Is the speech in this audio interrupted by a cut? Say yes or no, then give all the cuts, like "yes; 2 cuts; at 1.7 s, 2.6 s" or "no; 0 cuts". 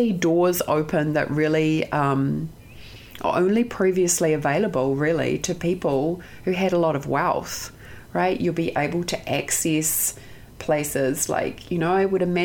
no; 0 cuts